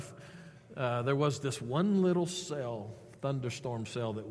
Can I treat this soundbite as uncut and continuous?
yes; 0 cuts

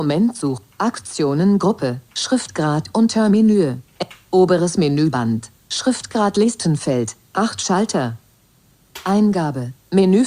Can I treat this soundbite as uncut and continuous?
no; 1 cut; at 2.1 s

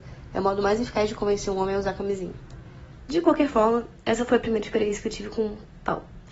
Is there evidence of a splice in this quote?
yes; 1 cut; at 3.0 s

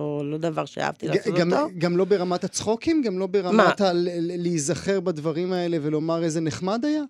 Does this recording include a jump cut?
no; 0 cuts

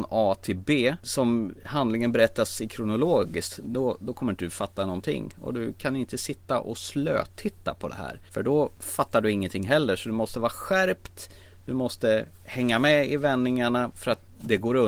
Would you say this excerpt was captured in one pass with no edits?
yes; 0 cuts

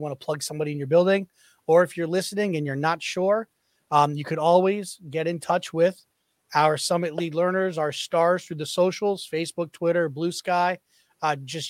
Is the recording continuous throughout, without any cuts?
yes; 0 cuts

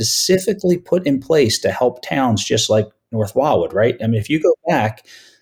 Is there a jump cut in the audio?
no; 0 cuts

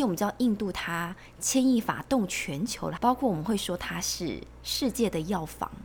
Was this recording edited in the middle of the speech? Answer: yes; 1 cut; at 3.0 s

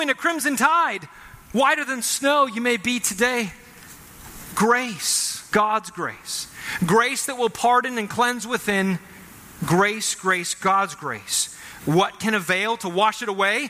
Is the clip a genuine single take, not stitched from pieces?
no; 2 cuts; at 5.5 s, 11.8 s

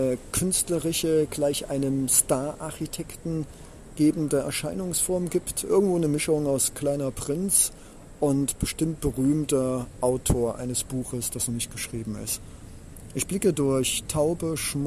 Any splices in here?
no; 0 cuts

